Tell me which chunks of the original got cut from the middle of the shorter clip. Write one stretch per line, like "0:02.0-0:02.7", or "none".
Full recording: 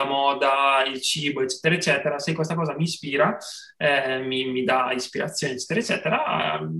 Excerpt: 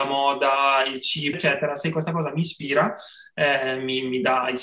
0:01.3-0:01.8